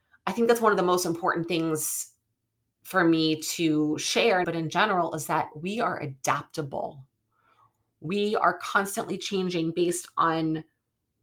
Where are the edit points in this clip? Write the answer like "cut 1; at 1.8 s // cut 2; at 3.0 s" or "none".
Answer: cut 1; at 4.4 s